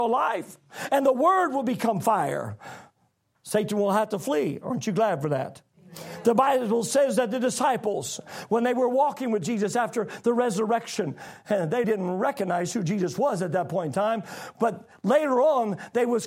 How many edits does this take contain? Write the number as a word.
one